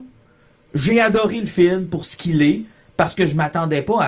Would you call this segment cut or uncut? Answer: uncut